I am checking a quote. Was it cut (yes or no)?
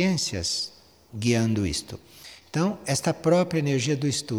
no